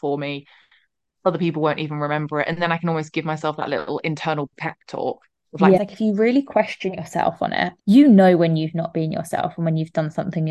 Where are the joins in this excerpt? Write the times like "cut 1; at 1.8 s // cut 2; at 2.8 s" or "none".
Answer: cut 1; at 5.8 s // cut 2; at 7.8 s